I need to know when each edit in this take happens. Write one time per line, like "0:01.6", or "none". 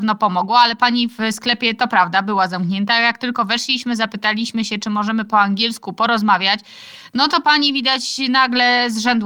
none